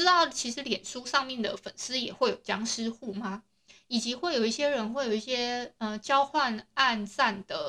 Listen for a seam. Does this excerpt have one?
no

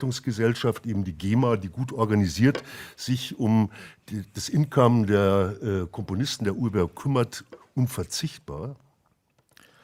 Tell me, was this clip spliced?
no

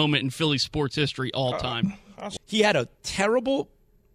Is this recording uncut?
no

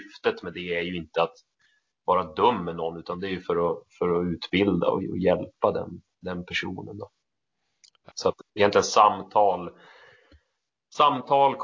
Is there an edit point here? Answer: yes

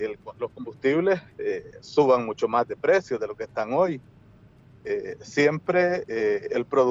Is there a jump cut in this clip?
no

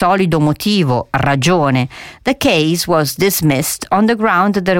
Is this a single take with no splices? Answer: yes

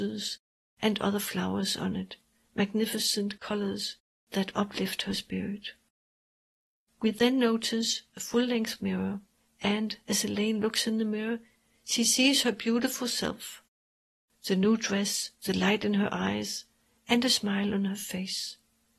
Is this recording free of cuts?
yes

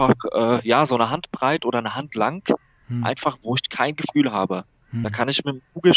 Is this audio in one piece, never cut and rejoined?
yes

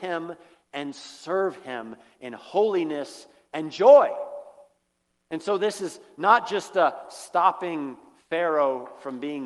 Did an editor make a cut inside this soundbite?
no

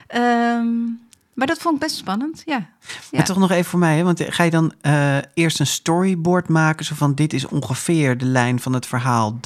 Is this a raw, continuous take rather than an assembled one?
yes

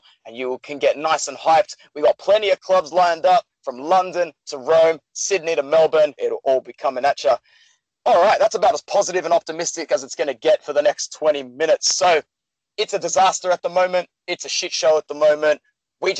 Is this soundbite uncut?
no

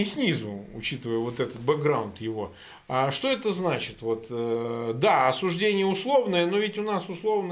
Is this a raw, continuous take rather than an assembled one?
yes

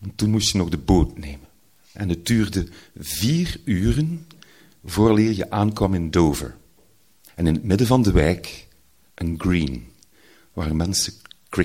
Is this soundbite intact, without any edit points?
no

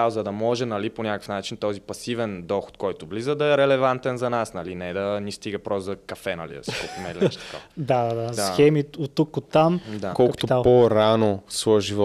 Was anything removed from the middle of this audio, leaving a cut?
yes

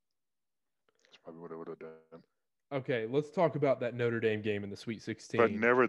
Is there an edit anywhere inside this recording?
no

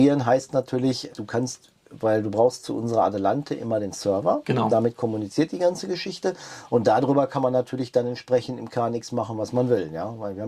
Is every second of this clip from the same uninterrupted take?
no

